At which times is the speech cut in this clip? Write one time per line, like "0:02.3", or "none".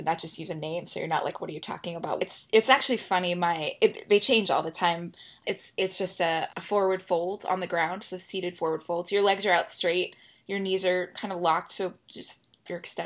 0:02.2
0:05.4
0:06.5